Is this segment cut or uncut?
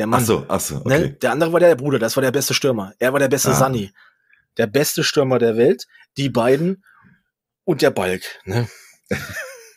cut